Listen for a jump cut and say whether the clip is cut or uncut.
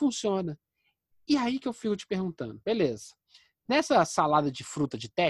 uncut